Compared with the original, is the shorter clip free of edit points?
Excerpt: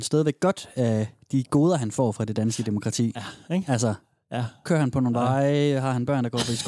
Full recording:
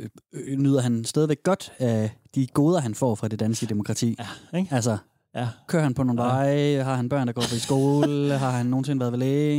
yes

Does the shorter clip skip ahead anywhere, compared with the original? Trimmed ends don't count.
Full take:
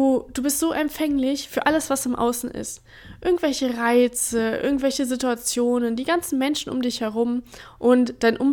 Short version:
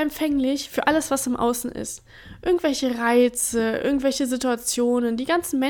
no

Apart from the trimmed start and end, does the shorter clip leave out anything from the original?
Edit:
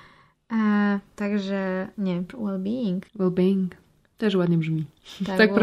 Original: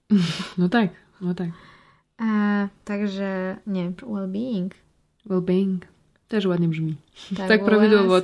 yes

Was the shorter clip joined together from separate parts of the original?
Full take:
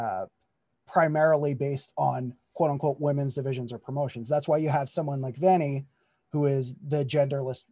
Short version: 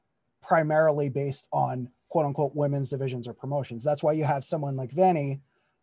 no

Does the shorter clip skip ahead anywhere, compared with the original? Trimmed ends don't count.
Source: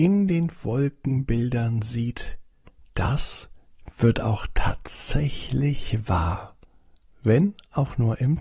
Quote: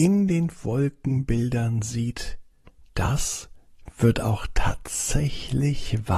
no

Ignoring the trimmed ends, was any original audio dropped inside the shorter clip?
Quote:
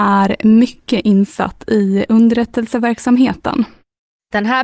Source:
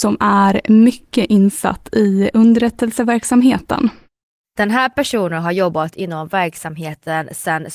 no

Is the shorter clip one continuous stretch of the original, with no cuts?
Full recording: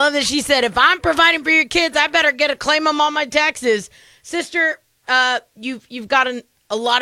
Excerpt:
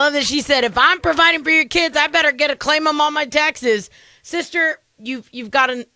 no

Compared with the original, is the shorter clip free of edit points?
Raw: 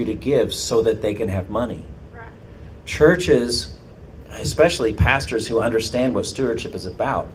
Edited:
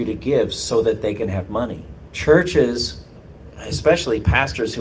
no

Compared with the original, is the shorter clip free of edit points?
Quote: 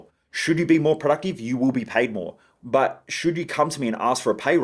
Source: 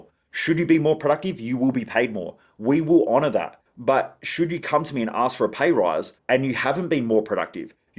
no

